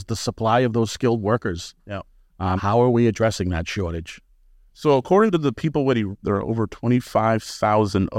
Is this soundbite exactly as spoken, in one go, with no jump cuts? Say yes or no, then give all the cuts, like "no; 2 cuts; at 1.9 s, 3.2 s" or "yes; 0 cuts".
no; 3 cuts; at 2.6 s, 4.7 s, 6.2 s